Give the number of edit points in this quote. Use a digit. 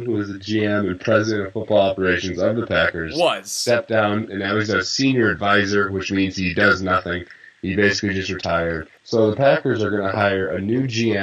1